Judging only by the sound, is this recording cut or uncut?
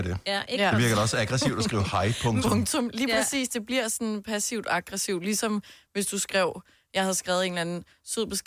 uncut